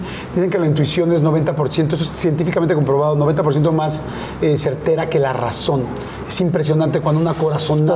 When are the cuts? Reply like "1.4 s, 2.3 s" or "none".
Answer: none